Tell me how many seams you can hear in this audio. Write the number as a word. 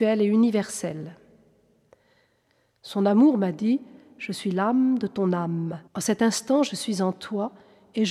one